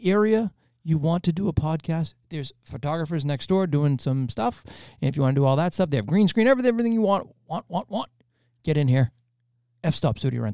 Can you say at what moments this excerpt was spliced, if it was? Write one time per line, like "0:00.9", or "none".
none